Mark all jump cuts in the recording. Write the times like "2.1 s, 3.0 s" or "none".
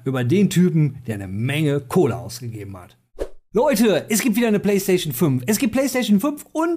none